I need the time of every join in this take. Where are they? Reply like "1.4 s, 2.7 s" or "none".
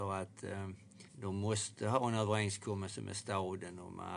1.1 s